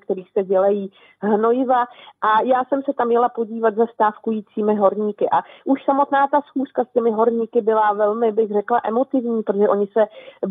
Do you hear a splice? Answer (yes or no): no